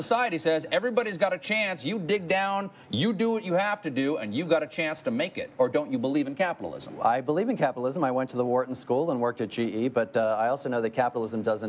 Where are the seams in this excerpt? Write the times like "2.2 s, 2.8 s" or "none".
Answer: none

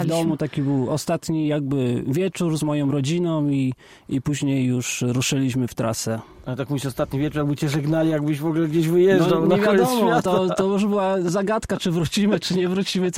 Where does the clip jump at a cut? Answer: none

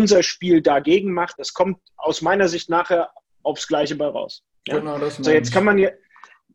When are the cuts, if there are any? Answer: 1.3 s, 4.5 s

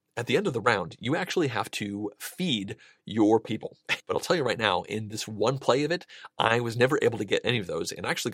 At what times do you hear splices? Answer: 4.0 s

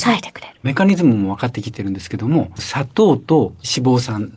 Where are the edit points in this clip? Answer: 2.6 s

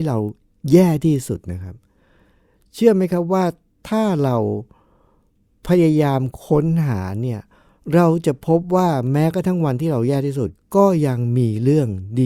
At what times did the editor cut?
none

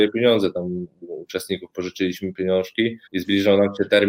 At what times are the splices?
3.1 s

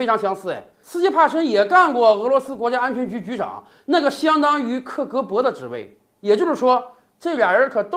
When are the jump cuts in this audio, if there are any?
none

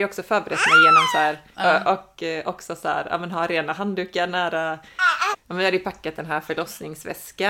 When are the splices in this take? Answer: 1.5 s, 5.3 s

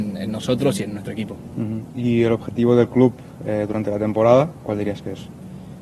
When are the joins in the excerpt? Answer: none

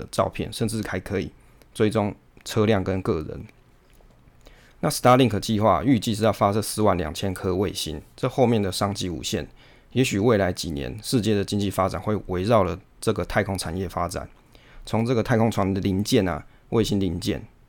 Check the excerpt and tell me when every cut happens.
none

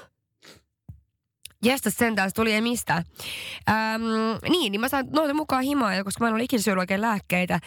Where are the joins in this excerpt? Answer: none

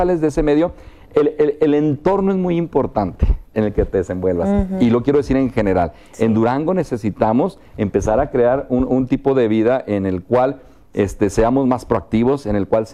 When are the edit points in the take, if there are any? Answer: none

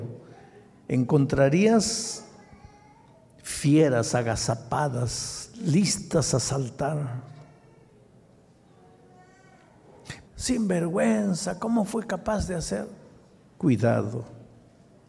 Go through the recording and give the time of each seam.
10.3 s

